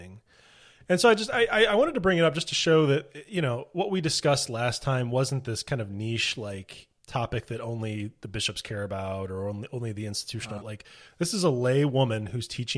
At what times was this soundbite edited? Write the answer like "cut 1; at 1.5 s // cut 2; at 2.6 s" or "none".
cut 1; at 7.0 s // cut 2; at 10.6 s